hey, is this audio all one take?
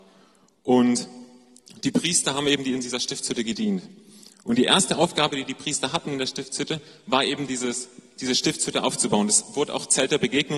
yes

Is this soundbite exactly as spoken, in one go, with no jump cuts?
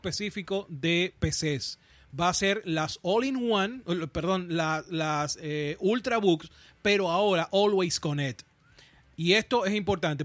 yes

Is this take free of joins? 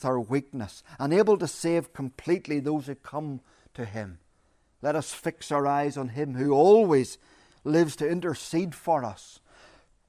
yes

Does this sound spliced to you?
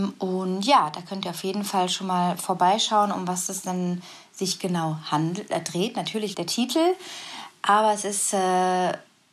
yes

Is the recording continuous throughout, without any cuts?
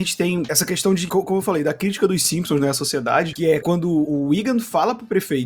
yes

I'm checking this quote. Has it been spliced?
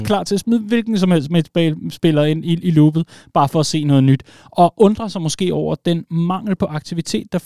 no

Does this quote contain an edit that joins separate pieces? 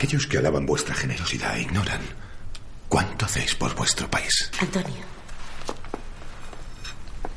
yes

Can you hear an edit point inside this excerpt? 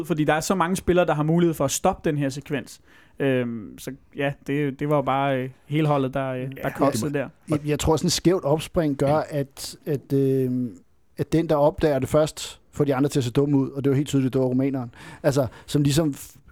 no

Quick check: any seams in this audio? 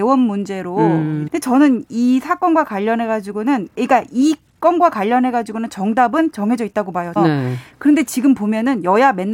yes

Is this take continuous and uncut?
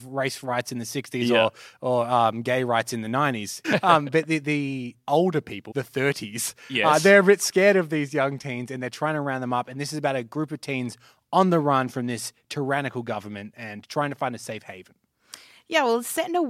no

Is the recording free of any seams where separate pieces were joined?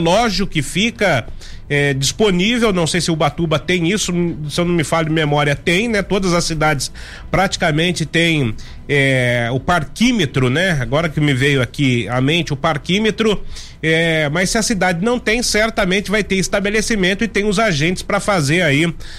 yes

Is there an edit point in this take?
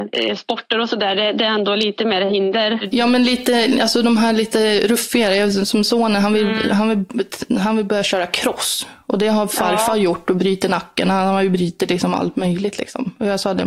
no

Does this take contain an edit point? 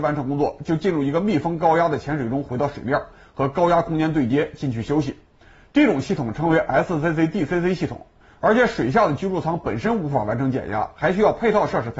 yes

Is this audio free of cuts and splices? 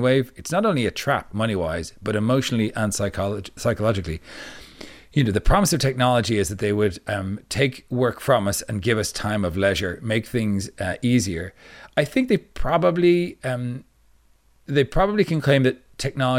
yes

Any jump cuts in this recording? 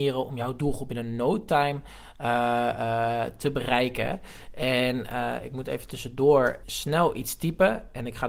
yes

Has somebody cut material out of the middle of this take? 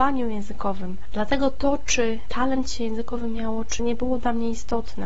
yes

